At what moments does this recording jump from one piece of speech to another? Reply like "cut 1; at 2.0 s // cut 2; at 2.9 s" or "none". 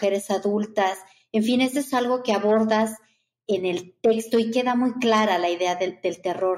none